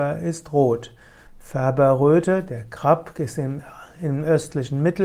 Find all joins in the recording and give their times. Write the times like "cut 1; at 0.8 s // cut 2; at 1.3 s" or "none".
cut 1; at 1.3 s